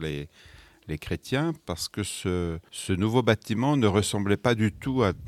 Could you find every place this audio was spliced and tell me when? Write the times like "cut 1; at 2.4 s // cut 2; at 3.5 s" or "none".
none